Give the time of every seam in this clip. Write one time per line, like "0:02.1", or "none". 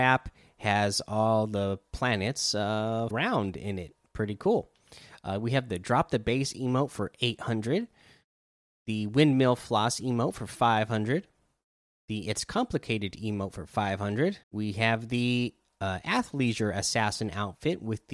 0:03.1
0:14.4